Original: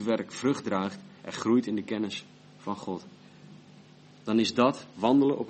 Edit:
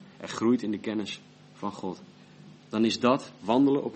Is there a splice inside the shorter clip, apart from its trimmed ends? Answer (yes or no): yes